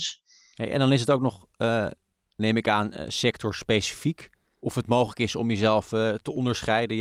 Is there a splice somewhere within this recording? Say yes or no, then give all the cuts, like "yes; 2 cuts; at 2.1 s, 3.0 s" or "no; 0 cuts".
no; 0 cuts